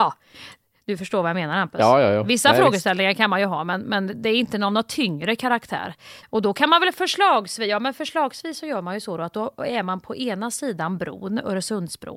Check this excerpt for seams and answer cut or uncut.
cut